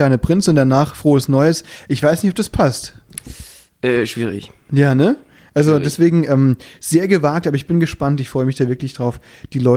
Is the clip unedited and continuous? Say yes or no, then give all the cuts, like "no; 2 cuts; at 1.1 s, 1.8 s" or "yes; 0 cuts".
yes; 0 cuts